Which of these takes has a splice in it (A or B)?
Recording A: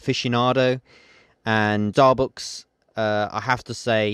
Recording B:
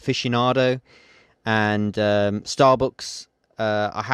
A